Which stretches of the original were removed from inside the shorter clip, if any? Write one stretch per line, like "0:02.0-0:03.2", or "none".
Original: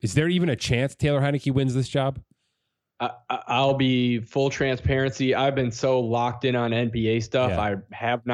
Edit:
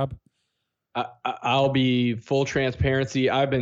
none